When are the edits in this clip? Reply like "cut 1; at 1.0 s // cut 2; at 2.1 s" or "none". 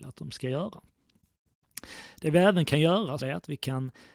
cut 1; at 3.2 s